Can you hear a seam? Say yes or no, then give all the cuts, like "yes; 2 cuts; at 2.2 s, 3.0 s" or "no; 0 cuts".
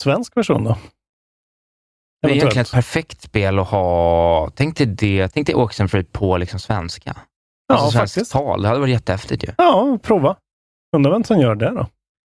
no; 0 cuts